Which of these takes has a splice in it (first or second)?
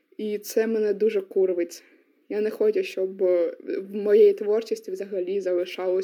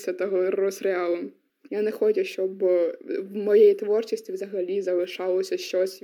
second